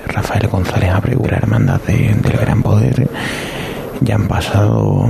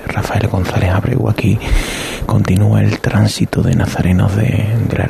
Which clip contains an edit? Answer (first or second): first